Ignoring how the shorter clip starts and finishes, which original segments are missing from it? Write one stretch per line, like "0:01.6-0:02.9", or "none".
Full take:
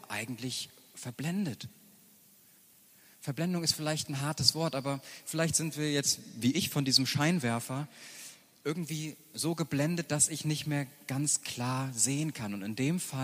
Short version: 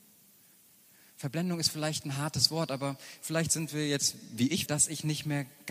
0:06.7-0:10.1